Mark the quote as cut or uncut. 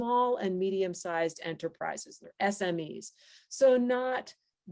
uncut